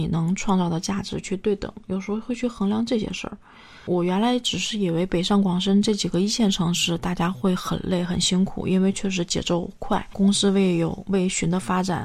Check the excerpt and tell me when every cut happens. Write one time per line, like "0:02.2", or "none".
none